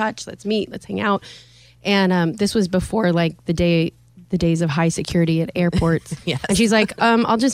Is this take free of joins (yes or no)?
yes